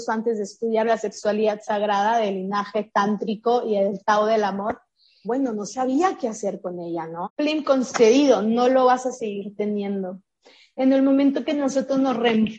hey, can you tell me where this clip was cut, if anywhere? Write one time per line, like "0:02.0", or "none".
0:05.2
0:07.2

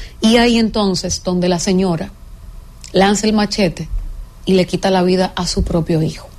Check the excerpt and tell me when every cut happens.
none

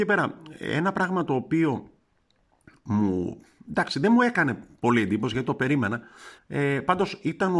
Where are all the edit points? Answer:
0:06.4

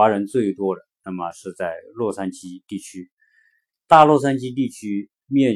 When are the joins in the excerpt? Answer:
0:03.8

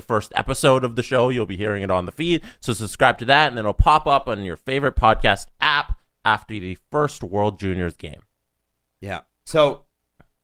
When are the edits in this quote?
none

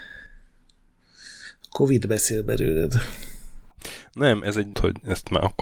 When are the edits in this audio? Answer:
0:04.7

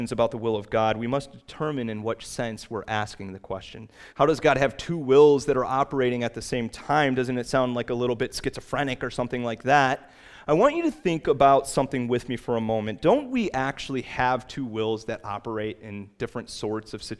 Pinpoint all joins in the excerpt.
0:04.1

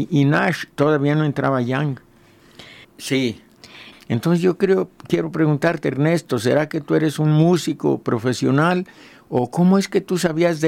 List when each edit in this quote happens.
0:02.8
0:03.9

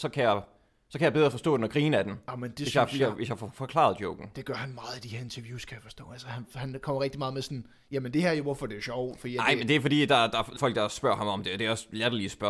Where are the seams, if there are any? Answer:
0:10.6

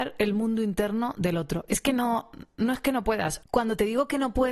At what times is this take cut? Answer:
none

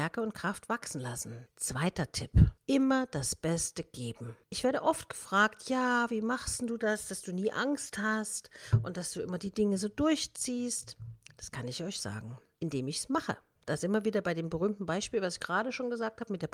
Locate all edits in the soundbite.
none

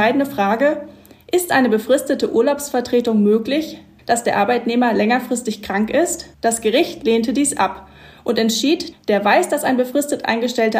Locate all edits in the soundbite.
0:04.0
0:06.3
0:08.9

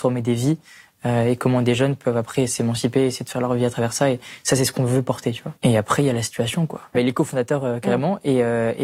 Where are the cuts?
0:05.6
0:06.9

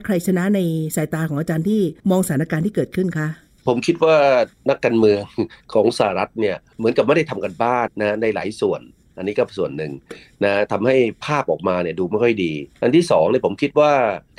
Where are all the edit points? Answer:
0:07.9
0:12.7

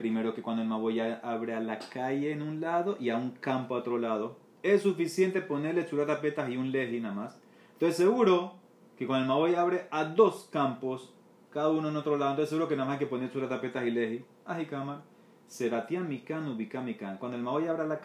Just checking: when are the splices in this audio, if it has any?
0:14.4

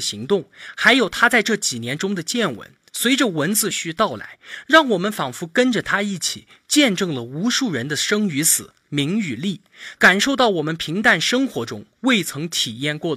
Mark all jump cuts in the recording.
0:03.7
0:10.0

